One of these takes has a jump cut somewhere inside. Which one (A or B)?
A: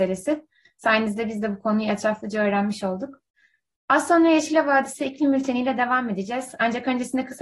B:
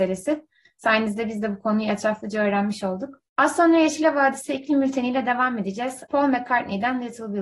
B